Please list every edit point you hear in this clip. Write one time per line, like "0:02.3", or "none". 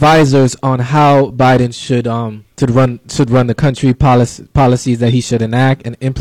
0:02.5